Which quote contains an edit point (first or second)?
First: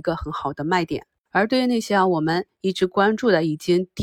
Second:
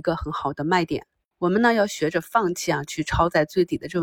second